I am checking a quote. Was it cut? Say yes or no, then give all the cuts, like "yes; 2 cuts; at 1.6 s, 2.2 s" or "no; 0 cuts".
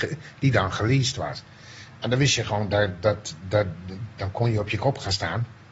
no; 0 cuts